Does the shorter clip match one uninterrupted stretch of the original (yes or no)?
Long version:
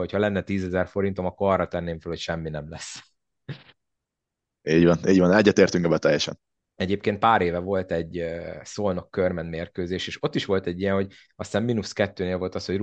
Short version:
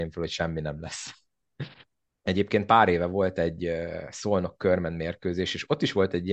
no